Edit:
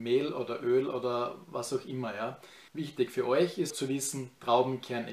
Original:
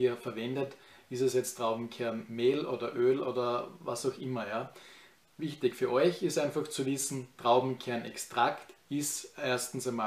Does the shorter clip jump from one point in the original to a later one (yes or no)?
yes